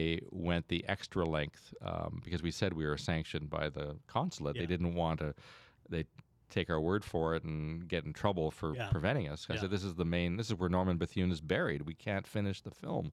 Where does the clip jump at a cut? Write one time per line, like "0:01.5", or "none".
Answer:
none